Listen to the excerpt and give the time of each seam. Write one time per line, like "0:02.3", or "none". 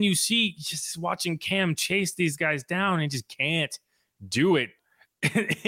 0:04.8